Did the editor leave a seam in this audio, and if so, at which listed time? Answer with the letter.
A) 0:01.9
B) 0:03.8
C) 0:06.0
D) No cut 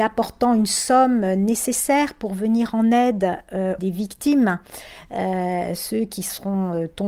B